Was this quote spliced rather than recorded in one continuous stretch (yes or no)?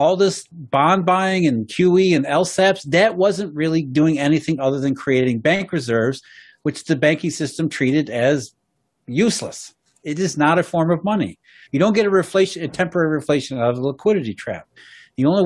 yes